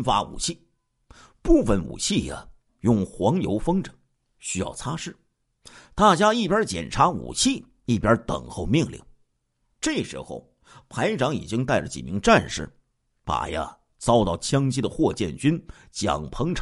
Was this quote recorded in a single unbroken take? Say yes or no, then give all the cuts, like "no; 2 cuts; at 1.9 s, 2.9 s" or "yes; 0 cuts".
yes; 0 cuts